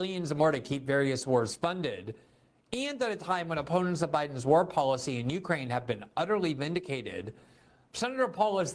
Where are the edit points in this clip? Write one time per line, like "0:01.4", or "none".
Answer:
none